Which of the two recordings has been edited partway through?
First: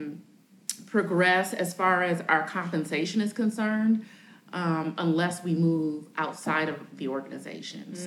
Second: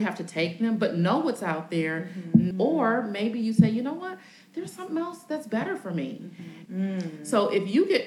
second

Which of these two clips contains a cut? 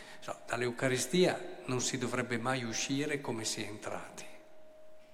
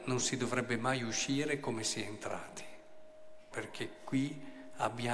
second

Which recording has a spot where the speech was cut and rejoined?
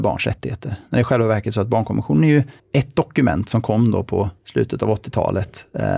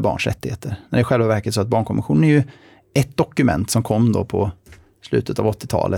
first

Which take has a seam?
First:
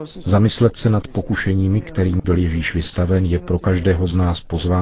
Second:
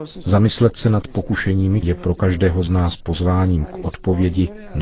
second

